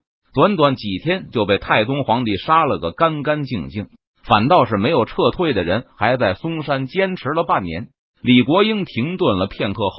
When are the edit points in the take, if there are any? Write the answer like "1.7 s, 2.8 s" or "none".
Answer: none

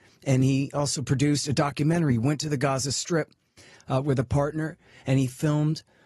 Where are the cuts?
none

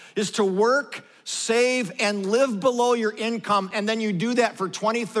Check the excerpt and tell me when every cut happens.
none

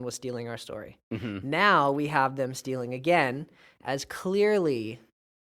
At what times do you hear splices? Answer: none

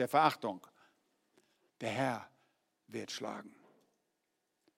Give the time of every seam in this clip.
1.7 s

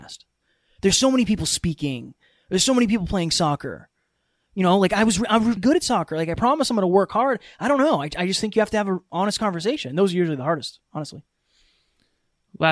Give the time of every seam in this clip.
5.6 s

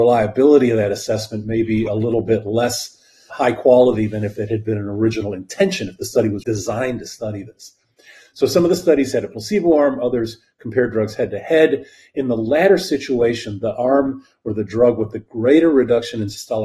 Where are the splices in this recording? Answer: 3.3 s, 6.4 s

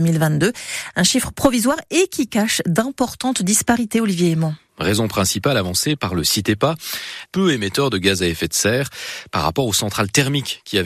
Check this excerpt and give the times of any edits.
4.7 s, 7.3 s

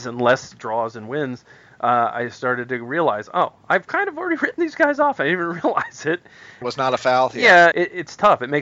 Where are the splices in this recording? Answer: 6.6 s, 7.7 s

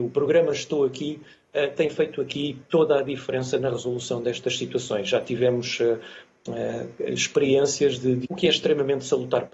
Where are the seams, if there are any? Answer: 8.2 s

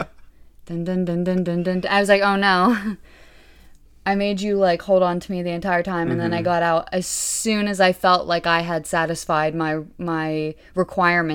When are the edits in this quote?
none

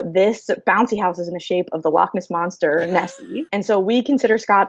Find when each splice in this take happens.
3.5 s

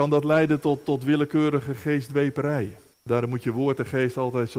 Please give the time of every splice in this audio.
2.9 s

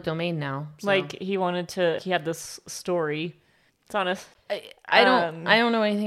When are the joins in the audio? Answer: 2.0 s, 3.7 s

